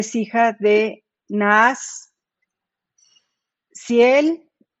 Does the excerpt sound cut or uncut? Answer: uncut